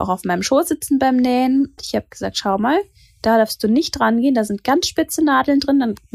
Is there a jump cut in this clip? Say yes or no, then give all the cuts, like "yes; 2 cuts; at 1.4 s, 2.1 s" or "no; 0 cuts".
yes; 1 cut; at 1.8 s